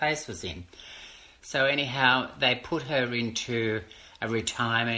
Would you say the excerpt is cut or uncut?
uncut